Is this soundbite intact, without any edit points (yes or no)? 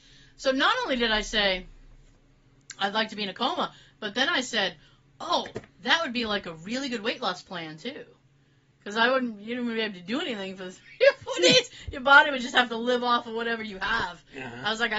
yes